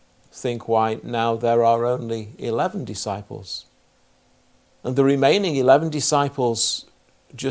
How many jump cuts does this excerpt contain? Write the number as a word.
one